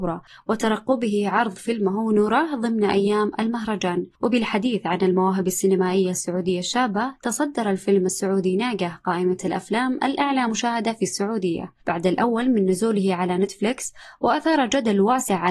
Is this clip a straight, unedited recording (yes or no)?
no